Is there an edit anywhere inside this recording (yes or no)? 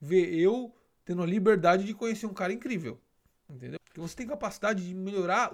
yes